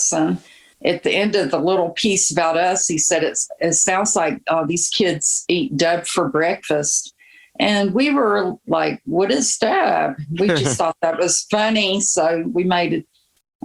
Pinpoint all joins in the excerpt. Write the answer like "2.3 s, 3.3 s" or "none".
none